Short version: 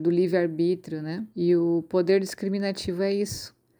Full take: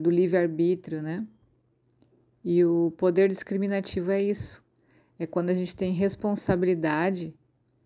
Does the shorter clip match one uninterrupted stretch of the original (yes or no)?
no